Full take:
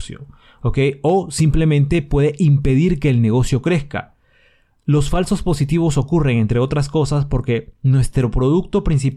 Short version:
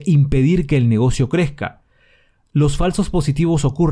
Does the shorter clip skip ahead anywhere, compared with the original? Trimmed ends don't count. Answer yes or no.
no